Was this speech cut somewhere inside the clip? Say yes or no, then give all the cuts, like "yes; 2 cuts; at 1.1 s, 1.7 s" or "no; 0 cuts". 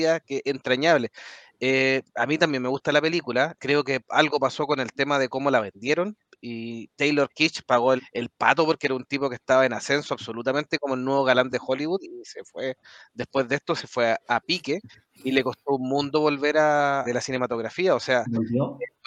yes; 3 cuts; at 3.6 s, 8.0 s, 17.0 s